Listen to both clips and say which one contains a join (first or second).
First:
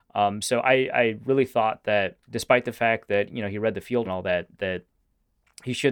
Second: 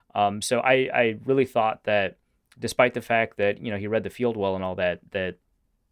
first